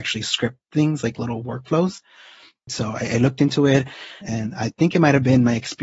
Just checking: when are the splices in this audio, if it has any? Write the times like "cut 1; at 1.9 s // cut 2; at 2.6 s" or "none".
cut 1; at 2.7 s // cut 2; at 4.2 s